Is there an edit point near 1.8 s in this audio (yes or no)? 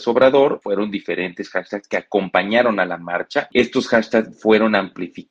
no